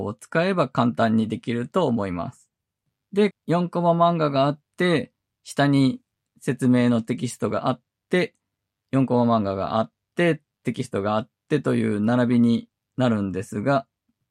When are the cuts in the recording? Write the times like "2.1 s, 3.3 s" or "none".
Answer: 3.3 s